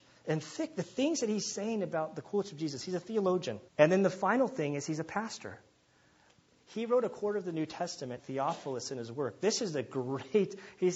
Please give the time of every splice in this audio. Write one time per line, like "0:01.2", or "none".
0:03.7
0:08.2